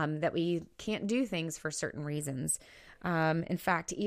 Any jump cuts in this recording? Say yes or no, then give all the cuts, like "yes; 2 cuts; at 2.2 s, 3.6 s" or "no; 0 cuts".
no; 0 cuts